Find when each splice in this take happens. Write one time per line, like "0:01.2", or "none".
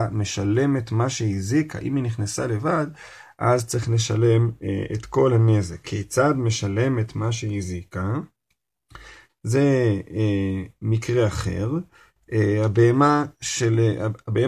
0:05.8
0:09.3